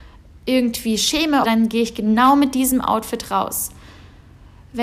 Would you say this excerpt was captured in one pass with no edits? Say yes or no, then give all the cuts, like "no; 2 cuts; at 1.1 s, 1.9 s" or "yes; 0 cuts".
no; 1 cut; at 1.4 s